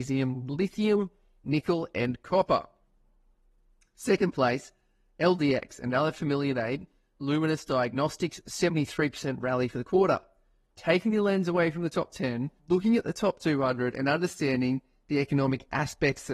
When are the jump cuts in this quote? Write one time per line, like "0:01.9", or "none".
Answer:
0:10.7
0:12.6